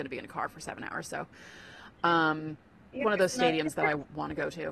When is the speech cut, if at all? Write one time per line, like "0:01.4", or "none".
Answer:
0:03.0